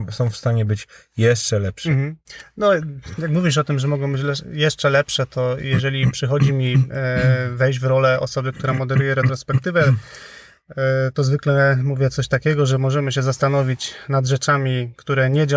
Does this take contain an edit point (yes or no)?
no